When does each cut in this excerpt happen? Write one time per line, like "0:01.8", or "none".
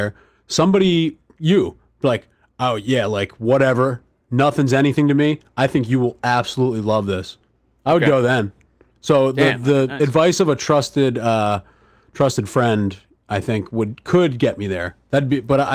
none